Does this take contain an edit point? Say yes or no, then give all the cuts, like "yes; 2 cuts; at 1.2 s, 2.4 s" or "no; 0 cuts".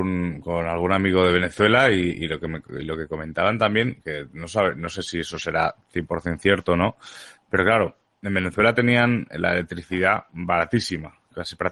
no; 0 cuts